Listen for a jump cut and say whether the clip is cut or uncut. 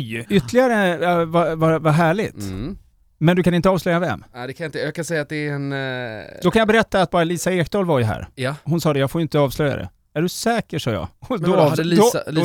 uncut